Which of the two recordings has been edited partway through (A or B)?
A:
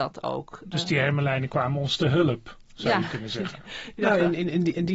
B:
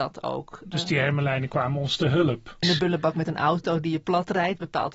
B